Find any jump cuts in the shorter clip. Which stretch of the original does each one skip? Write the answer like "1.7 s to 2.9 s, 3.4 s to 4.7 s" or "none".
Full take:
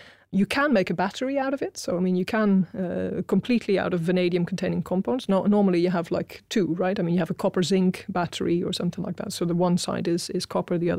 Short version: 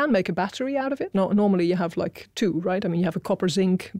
1.7 s to 5.3 s